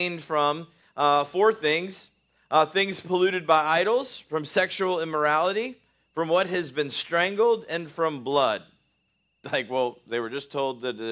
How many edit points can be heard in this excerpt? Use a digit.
1